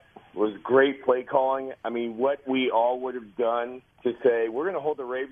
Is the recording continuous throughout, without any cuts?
no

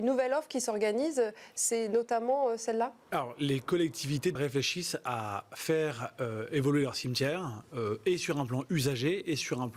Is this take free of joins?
no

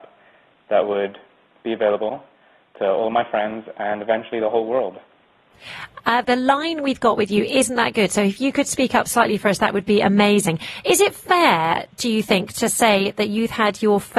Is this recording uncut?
no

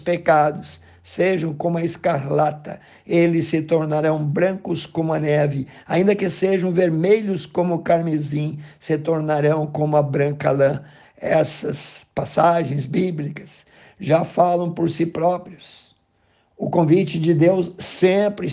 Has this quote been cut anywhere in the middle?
no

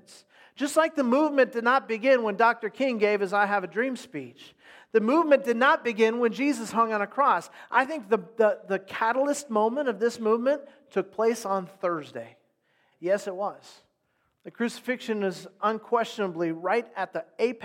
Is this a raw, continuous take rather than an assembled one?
no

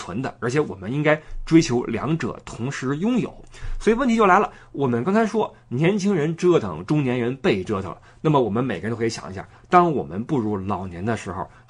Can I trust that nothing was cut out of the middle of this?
yes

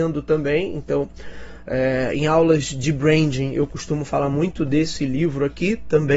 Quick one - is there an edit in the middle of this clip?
no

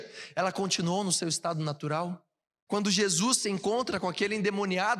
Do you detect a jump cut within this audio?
yes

